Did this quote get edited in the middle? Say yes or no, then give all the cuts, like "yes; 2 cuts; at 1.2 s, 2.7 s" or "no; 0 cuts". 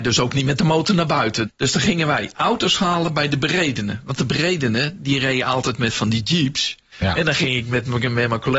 yes; 2 cuts; at 1.4 s, 6.9 s